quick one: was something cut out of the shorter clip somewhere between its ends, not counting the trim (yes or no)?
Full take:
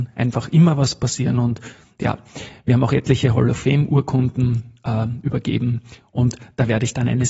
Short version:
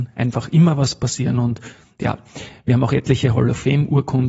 no